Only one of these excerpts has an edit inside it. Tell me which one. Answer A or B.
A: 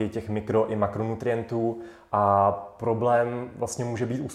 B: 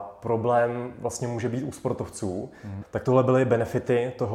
B